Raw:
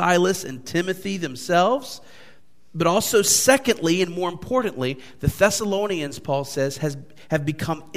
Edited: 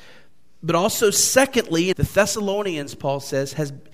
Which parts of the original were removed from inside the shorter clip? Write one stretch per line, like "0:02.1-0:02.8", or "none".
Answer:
0:04.0-0:05.2